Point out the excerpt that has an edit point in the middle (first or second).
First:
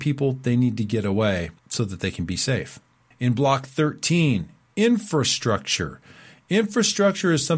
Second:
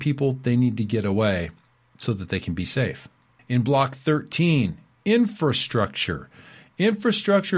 first